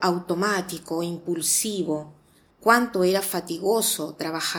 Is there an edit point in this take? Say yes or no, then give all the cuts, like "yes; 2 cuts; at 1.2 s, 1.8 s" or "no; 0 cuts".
yes; 1 cut; at 2.5 s